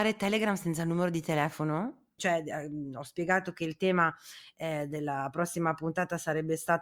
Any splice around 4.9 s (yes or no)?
no